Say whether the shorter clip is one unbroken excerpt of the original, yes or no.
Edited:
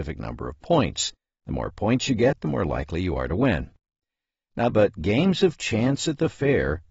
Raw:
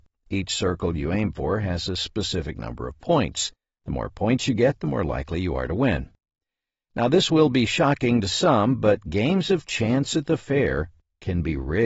no